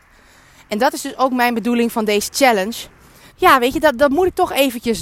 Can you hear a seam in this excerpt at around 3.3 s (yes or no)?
yes